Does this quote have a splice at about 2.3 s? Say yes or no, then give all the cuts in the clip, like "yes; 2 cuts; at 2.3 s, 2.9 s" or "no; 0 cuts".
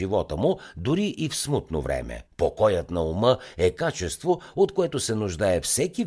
yes; 1 cut; at 2.3 s